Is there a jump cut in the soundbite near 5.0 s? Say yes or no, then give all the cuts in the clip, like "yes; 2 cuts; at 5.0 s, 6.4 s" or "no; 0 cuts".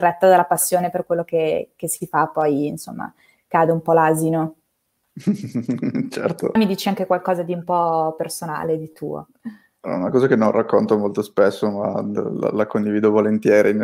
no; 1 cut; at 6.6 s